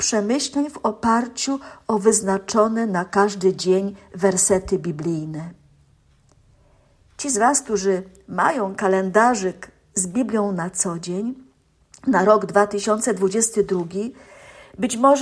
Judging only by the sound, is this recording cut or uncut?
uncut